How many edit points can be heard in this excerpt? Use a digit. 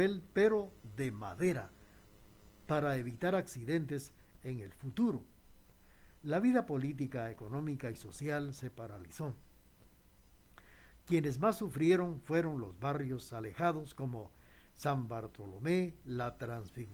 0